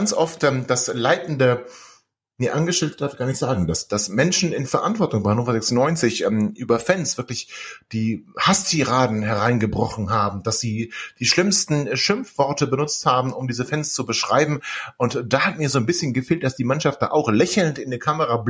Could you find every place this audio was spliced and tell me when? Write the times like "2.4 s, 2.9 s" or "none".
none